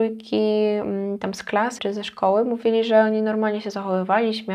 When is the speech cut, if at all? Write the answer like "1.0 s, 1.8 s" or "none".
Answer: 1.8 s